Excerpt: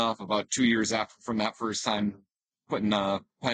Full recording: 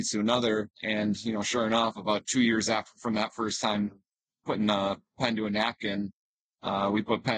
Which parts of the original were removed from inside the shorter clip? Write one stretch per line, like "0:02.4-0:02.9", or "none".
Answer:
none

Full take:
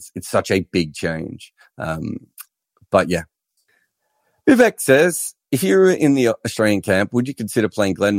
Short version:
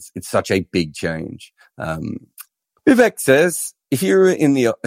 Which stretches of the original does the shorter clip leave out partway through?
0:02.8-0:04.4

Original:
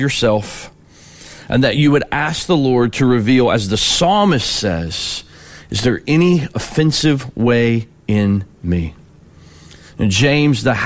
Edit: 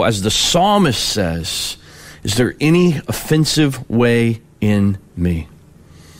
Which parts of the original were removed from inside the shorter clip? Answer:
none

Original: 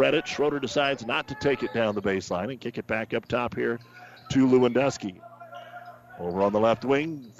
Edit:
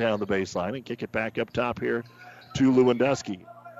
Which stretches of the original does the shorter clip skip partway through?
none

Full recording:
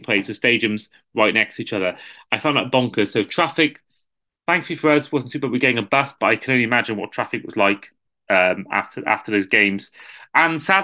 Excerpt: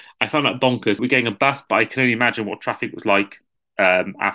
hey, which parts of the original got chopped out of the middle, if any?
0:03.1-0:05.5

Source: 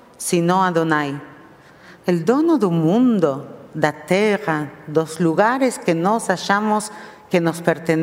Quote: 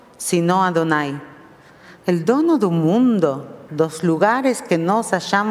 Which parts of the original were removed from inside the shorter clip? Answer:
0:03.7-0:04.8

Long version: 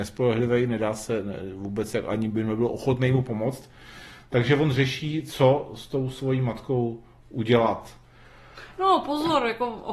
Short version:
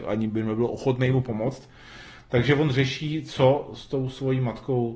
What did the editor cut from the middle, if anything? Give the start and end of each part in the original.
none

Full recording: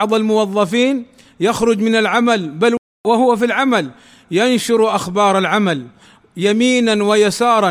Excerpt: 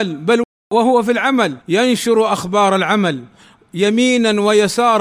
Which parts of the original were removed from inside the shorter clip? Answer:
0:03.9-0:04.2

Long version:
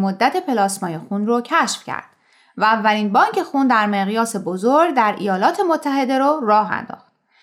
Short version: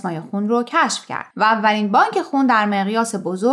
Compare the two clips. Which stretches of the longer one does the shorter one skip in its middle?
0:02.1-0:02.5

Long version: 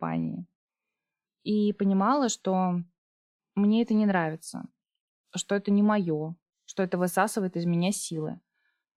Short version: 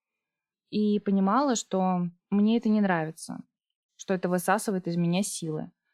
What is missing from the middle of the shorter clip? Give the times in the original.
0:02.9-0:03.4
0:05.1-0:06.6

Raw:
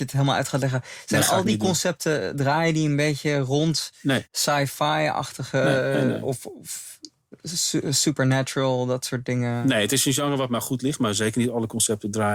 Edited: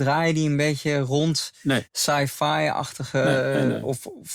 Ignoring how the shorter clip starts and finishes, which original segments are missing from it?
none

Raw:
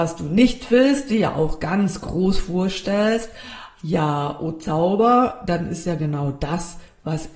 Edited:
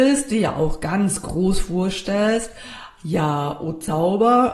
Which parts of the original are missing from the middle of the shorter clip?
none

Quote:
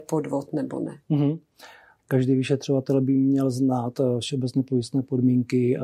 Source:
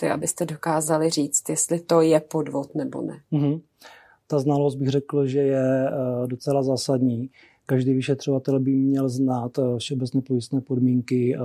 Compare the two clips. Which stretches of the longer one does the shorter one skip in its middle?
0:04.2-0:07.6

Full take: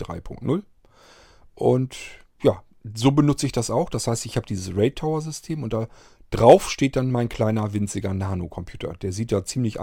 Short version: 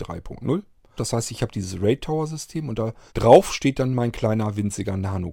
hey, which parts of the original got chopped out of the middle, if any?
0:01.0-0:03.9
0:06.0-0:06.3

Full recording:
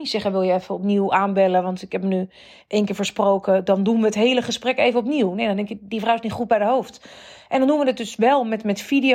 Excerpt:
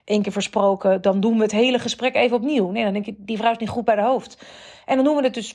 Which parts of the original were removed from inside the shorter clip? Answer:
none

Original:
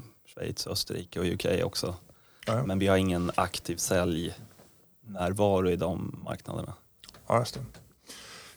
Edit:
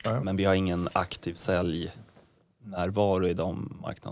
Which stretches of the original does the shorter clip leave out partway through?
none

